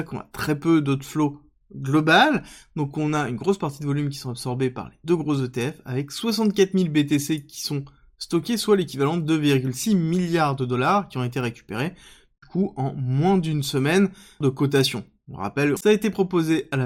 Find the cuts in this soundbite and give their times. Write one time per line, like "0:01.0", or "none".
0:14.4
0:15.8